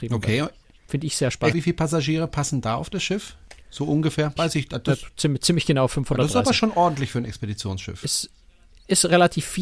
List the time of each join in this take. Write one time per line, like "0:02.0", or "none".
0:01.5
0:04.4

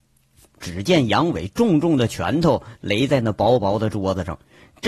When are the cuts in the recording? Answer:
none

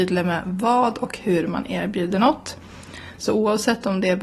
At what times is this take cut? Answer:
0:03.2

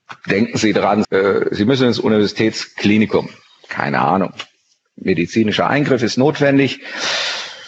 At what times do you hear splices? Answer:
0:01.0

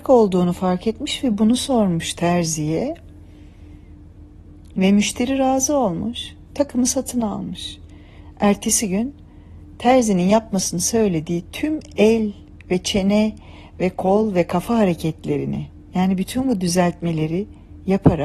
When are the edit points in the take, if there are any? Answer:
0:04.7

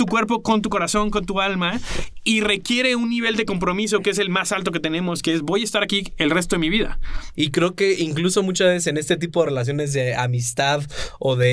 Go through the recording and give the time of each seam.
0:07.3

